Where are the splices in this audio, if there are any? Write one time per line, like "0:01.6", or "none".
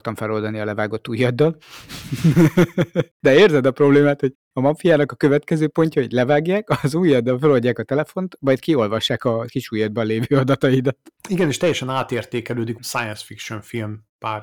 0:11.2
0:12.8

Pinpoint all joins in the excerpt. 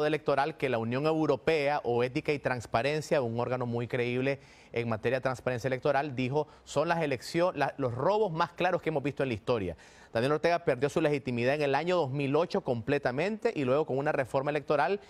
none

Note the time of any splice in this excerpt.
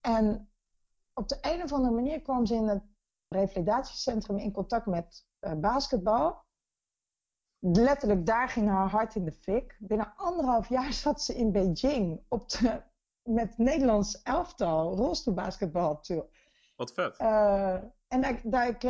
0:03.3

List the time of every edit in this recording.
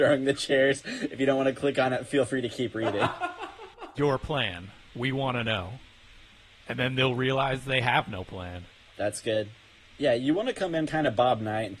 0:04.0

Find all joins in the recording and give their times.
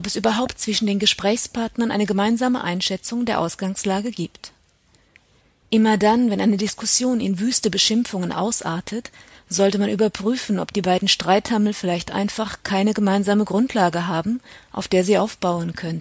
none

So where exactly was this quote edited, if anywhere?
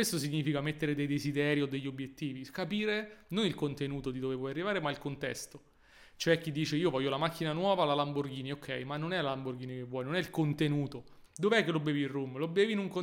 0:11.3

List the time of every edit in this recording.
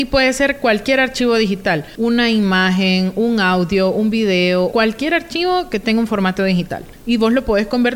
0:04.7

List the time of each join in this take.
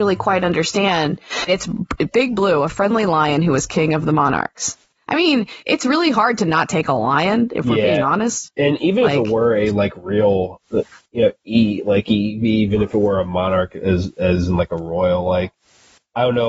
0:01.5

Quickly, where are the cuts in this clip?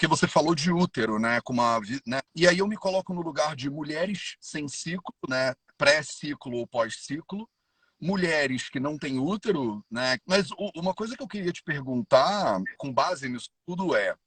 0:02.3
0:10.2
0:12.8

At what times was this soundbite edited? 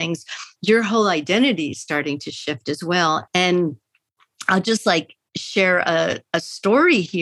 0:03.3

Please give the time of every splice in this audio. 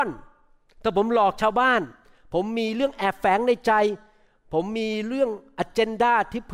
none

